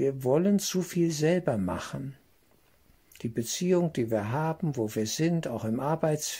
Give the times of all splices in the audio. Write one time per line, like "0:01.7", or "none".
0:03.2
0:04.7

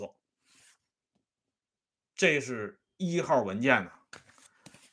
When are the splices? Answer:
none

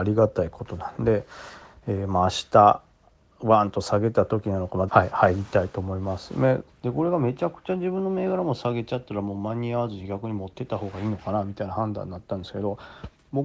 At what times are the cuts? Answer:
0:04.9
0:06.7

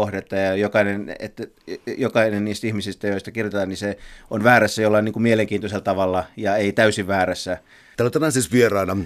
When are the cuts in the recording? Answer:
0:07.9

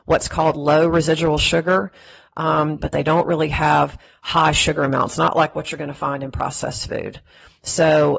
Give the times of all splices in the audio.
0:02.8

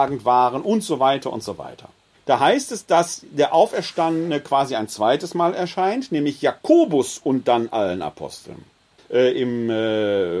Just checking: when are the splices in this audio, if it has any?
0:02.1
0:09.0

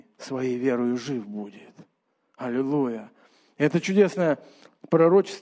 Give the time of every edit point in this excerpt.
none

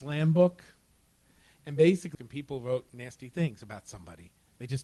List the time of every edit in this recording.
0:02.1

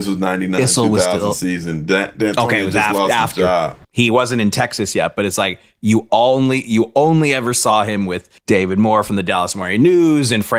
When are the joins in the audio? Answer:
0:03.8
0:08.4

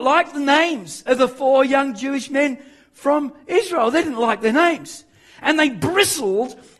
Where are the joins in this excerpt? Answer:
none

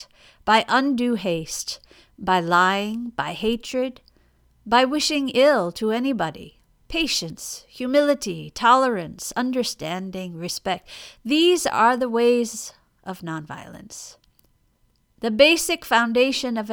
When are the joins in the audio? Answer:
0:06.8

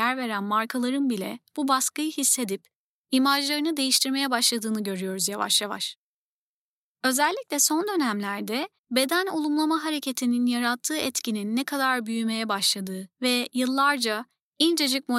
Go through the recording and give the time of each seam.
0:06.9
0:08.8
0:13.1

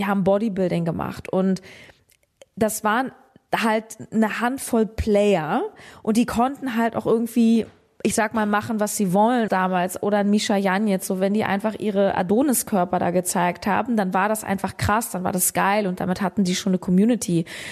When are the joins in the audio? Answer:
0:09.5

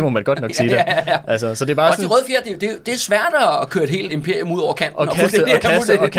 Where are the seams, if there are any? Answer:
0:04.1

